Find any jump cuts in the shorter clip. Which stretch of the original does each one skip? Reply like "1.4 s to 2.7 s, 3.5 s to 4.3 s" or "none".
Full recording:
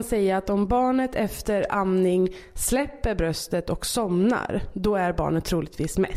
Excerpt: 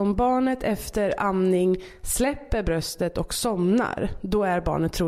none

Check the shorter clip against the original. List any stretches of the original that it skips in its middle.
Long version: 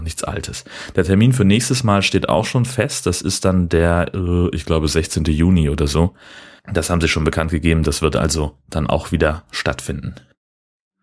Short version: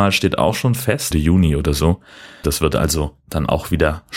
3.0 s to 5.2 s, 6.6 s to 7.8 s

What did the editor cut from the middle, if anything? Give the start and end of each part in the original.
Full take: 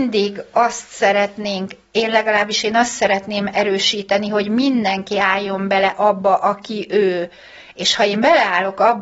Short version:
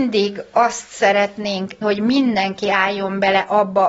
1.8 s to 4.3 s

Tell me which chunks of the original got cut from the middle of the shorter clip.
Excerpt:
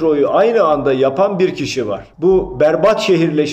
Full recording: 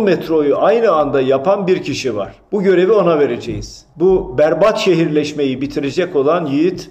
2.4 s to 3.9 s

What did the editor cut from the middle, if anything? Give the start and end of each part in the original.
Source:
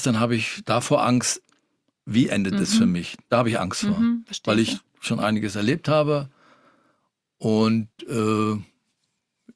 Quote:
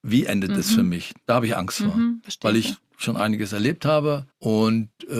6.3 s to 7.3 s

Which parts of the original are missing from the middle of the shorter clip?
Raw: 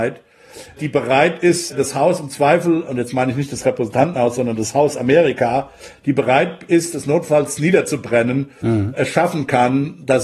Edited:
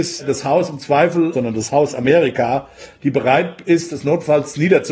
2.8 s to 4.4 s

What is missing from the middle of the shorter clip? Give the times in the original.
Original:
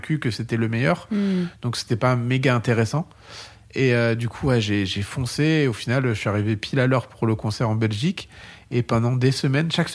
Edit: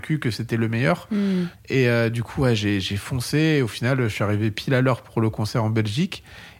1.5 s to 3.6 s

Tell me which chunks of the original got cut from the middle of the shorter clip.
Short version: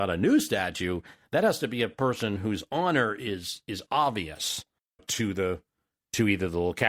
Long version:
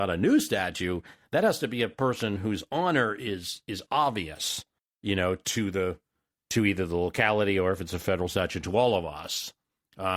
5.0 s to 5.4 s

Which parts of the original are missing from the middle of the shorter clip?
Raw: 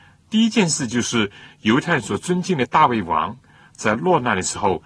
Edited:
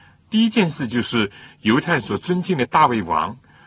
none

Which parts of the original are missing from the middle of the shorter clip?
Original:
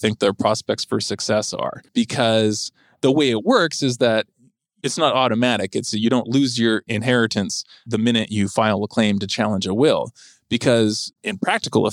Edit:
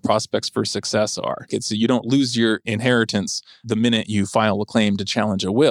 1.8 s to 5.7 s

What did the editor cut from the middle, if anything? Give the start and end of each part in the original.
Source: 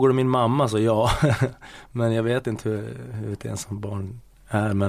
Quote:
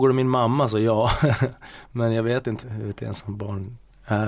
2.6 s to 3.1 s

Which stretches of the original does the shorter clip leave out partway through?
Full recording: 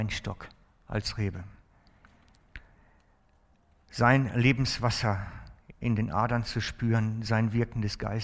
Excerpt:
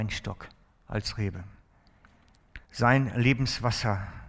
2.6 s to 3.8 s

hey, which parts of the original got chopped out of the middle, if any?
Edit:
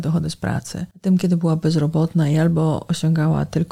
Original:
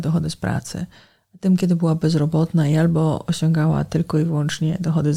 0.9 s to 1.3 s

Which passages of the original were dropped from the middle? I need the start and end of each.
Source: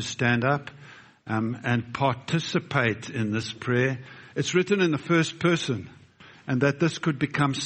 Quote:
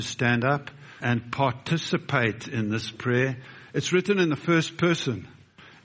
1.0 s to 1.6 s

